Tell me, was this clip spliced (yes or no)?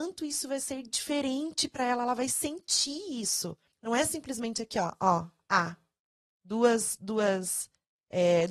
yes